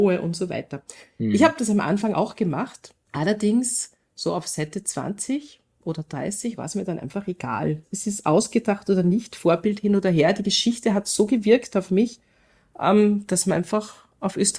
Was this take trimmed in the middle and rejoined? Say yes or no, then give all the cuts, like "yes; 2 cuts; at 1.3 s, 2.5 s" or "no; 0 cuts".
no; 0 cuts